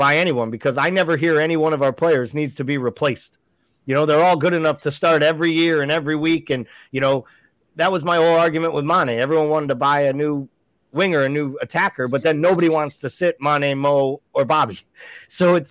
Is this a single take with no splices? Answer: yes; 0 cuts

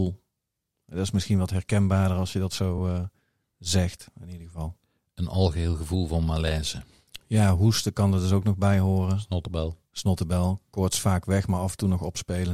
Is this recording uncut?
yes; 0 cuts

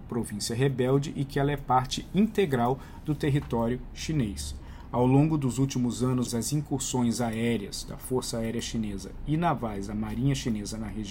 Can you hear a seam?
yes; 1 cut; at 6.3 s

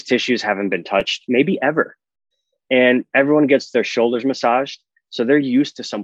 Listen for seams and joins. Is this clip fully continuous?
yes; 0 cuts

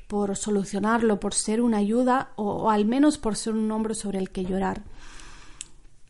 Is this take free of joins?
yes; 0 cuts

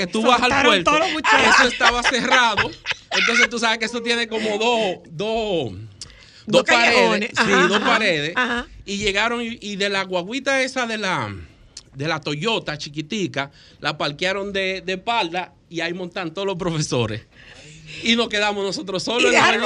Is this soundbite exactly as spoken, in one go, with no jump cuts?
yes; 0 cuts

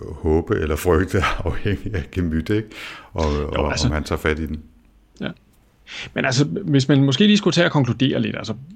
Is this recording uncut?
yes; 0 cuts

